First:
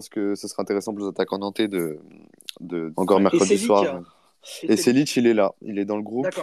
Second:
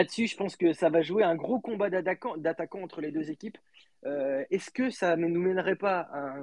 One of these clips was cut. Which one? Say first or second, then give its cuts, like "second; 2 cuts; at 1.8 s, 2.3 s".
first; 1 cut; at 2.9 s